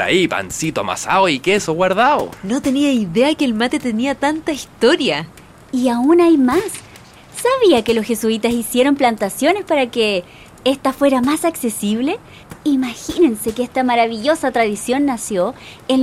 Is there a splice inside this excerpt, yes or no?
no